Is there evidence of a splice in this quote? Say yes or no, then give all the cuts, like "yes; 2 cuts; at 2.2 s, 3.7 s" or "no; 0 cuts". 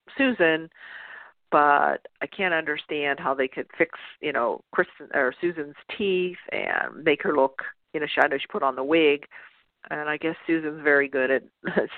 no; 0 cuts